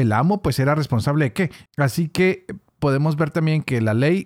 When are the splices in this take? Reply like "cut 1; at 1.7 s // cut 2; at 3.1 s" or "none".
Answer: cut 1; at 1.7 s